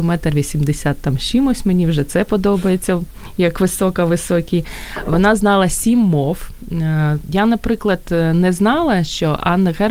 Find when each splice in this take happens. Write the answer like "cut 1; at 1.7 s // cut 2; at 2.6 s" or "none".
cut 1; at 7.2 s